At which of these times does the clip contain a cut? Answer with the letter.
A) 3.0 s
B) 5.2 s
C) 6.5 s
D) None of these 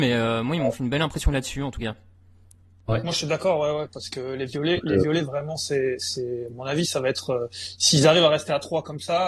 D